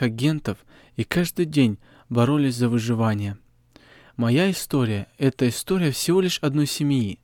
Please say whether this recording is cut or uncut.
uncut